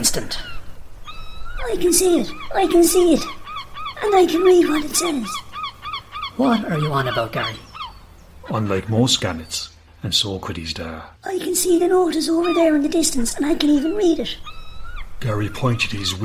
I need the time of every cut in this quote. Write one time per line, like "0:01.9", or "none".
0:09.9
0:11.2